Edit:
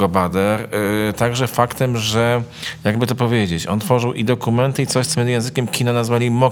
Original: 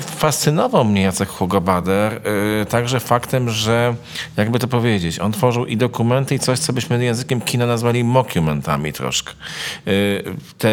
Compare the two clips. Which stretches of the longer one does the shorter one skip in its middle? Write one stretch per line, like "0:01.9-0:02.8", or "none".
0:06.7-0:06.9